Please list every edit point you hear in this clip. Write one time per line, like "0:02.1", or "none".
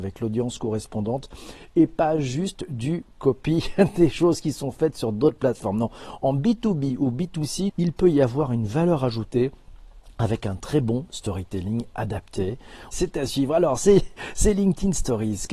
0:07.7
0:12.9

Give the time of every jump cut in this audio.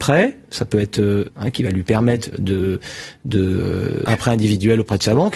0:01.3
0:02.3
0:04.1

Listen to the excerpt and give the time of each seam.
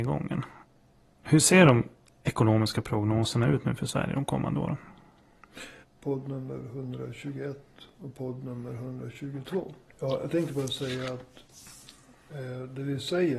0:05.8
0:09.9

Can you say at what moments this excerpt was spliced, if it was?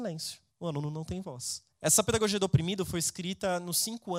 0:01.7

